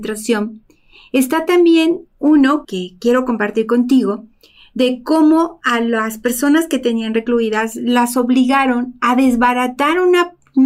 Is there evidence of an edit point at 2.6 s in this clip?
yes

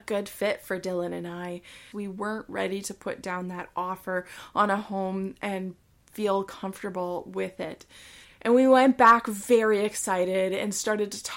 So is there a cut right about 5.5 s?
no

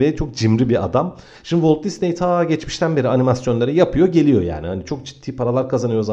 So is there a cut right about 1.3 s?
yes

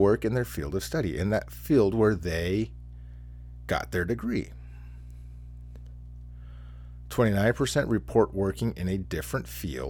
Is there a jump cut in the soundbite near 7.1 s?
no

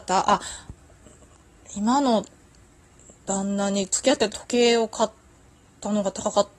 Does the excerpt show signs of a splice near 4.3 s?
yes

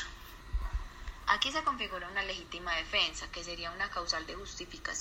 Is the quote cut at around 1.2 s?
yes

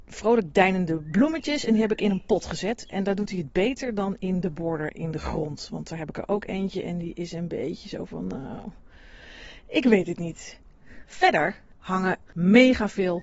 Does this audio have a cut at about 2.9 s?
no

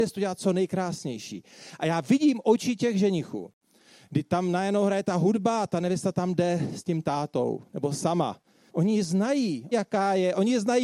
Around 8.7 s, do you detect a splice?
yes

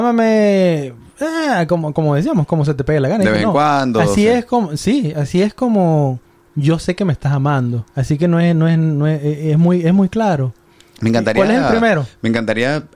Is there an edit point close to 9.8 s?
no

